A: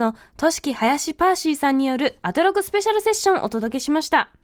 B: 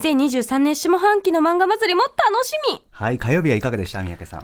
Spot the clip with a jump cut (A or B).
B